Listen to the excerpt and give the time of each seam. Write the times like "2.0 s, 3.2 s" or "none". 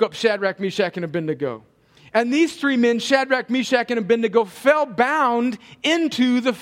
none